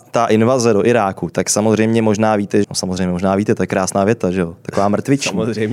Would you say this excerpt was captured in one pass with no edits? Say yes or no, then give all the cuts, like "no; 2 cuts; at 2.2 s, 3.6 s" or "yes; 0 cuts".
no; 1 cut; at 2.6 s